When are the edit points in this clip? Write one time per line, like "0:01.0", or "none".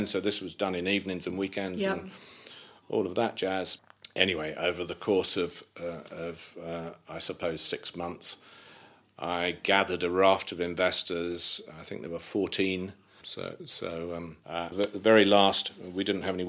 0:13.2
0:14.7

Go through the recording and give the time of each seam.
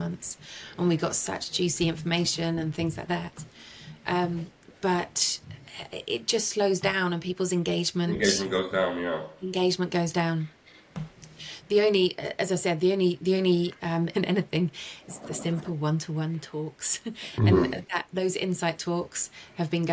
0:14.1
0:15.2

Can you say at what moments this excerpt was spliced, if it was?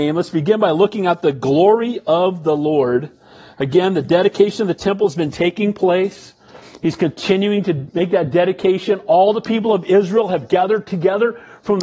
none

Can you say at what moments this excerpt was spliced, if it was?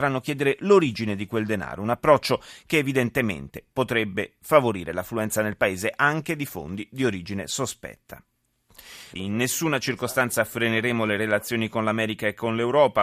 0:09.2

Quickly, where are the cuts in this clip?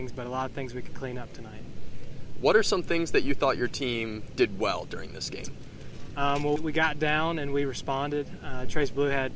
0:06.6

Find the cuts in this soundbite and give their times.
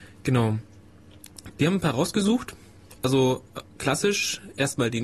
0:01.5

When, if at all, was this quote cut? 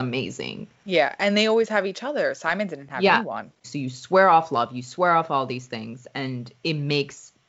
0:03.6

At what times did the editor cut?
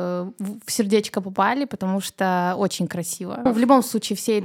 0:03.5

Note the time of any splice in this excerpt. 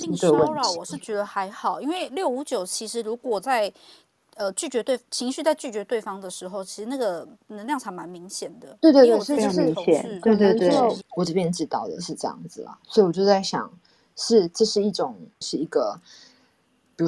0:11.0
0:15.4

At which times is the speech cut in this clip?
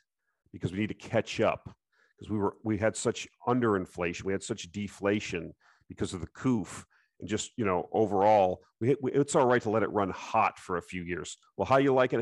none

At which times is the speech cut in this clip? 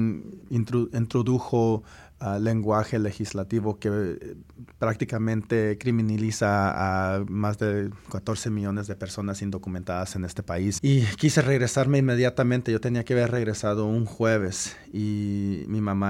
0:10.8

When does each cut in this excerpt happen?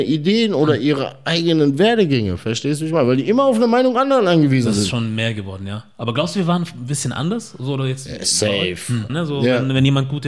0:09.1

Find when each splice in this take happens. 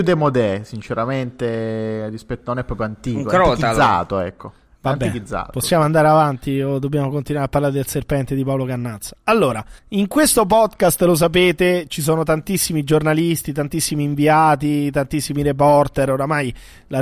0:09.8

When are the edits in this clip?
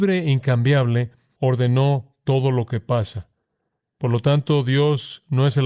none

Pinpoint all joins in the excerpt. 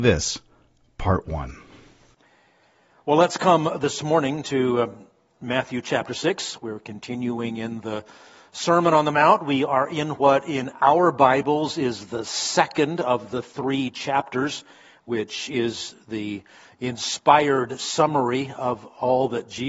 none

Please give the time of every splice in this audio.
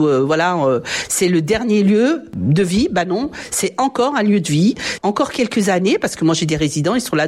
0:05.0

